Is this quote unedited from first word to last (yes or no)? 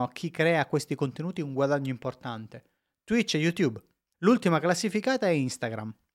no